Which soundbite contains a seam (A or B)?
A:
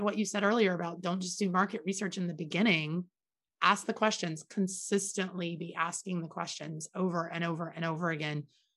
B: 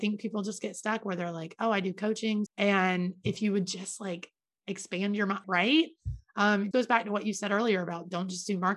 B